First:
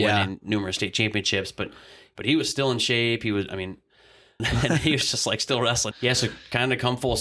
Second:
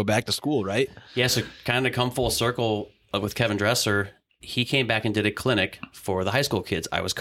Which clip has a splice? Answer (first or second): first